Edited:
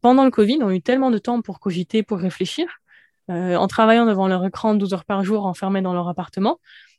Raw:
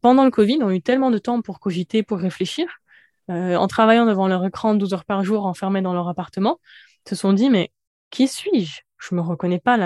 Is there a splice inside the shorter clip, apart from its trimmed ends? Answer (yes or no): no